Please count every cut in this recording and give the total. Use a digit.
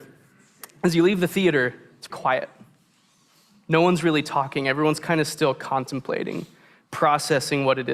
1